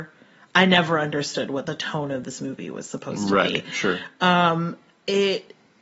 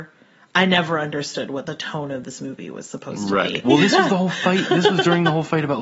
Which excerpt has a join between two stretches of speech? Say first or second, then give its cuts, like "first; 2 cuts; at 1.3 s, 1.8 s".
second; 1 cut; at 3.6 s